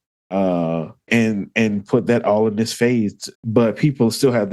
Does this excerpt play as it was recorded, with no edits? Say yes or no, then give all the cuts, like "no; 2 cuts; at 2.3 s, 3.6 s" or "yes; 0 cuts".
no; 2 cuts; at 1.1 s, 3.4 s